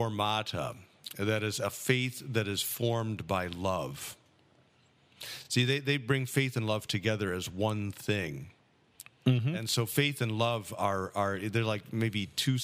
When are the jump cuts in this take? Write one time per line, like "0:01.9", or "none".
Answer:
none